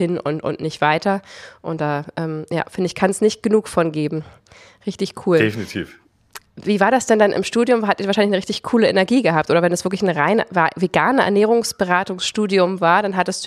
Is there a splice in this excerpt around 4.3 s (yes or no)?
no